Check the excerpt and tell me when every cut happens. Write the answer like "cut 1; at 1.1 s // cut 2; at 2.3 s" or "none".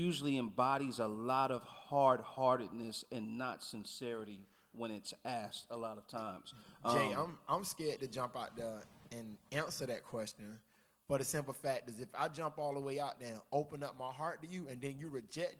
none